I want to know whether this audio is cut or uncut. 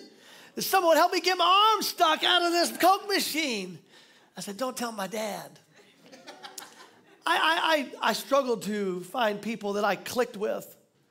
uncut